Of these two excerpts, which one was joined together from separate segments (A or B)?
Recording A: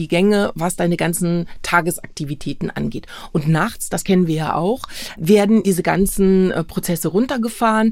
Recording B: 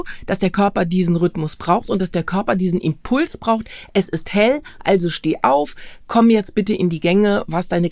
A